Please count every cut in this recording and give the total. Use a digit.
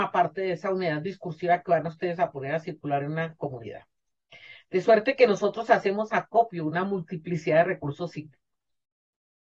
1